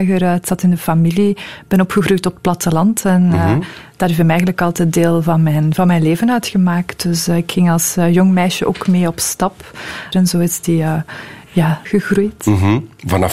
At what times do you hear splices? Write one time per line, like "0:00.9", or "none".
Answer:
0:10.1
0:11.9